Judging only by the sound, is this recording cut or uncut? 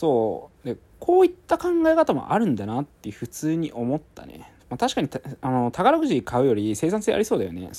cut